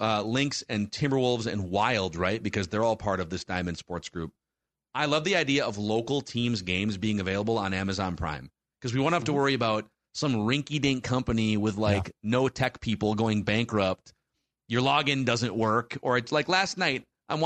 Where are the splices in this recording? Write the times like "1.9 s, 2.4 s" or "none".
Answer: none